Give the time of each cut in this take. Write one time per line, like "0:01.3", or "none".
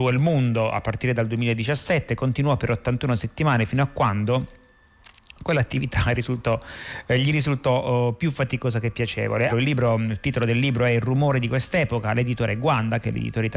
0:09.5